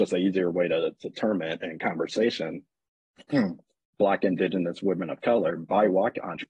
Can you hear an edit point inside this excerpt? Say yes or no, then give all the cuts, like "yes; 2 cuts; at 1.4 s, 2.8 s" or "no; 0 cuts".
no; 0 cuts